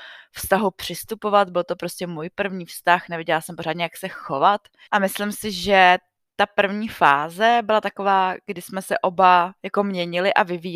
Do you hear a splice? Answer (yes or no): yes